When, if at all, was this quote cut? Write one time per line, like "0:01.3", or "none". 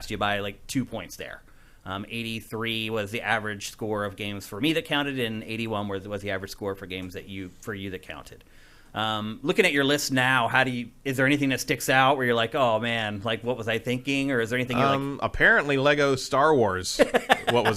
none

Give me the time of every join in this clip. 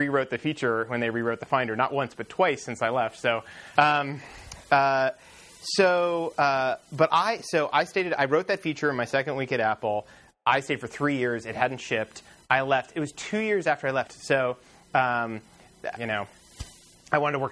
0:03.8
0:14.1
0:16.0

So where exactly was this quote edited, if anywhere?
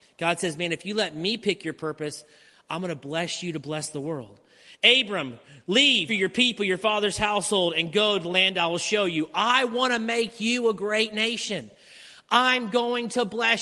0:06.1

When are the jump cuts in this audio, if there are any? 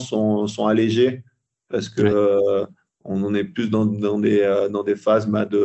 none

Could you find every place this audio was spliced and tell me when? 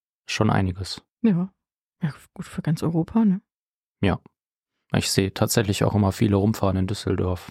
none

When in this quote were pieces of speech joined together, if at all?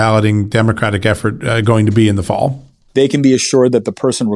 0:02.9

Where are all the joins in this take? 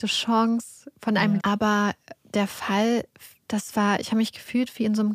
0:01.4
0:03.4

